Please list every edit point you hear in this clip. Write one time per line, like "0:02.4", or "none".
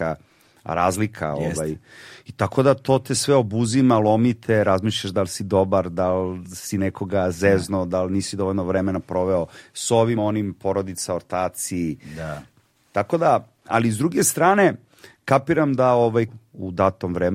0:10.2
0:16.3